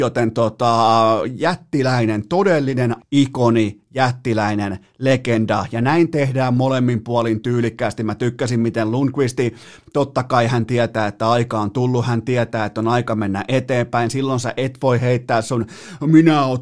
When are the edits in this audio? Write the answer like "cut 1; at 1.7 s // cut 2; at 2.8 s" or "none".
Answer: cut 1; at 3.0 s